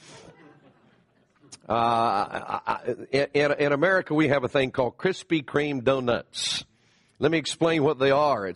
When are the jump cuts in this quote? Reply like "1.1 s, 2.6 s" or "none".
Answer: none